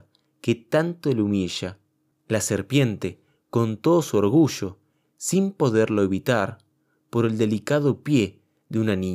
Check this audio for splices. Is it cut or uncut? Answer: cut